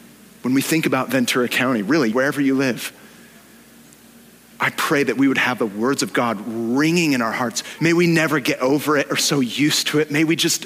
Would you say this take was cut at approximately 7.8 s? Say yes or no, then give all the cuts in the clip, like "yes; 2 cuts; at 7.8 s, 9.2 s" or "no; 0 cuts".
yes; 2 cuts; at 2.1 s, 7.8 s